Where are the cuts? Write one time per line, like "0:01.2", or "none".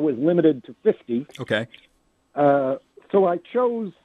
none